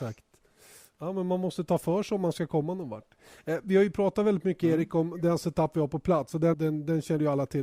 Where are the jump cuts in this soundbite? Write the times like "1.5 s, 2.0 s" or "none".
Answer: 6.5 s